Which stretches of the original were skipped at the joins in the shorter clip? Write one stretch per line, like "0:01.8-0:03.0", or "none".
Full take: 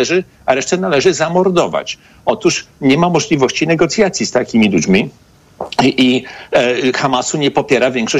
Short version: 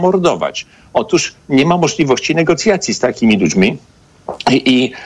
none